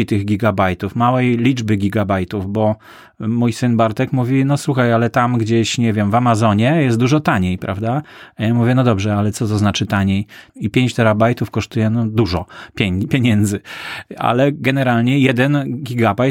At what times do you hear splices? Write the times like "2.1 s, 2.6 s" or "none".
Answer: 10.5 s